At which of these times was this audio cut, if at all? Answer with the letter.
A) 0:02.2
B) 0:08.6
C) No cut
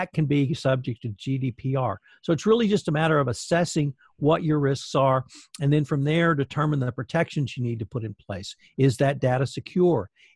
C